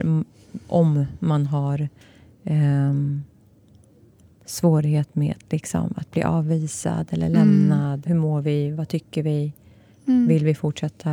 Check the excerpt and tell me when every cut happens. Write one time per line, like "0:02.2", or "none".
0:08.0